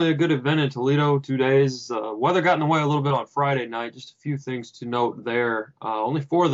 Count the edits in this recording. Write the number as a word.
zero